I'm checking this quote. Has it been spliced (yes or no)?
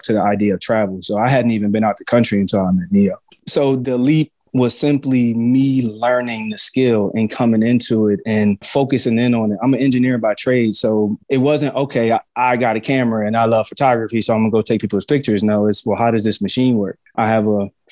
no